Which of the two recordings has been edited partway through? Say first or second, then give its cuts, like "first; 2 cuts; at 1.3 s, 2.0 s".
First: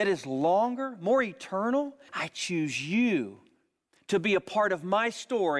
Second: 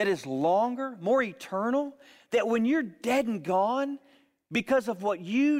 first; 1 cut; at 2.1 s